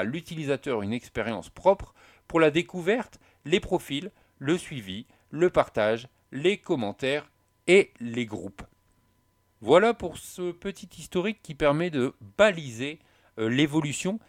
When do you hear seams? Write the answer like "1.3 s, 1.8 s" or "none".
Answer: none